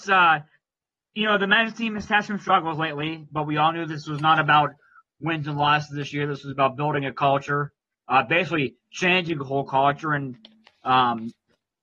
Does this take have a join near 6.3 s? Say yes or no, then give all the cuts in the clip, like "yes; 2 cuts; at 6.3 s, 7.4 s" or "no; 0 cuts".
no; 0 cuts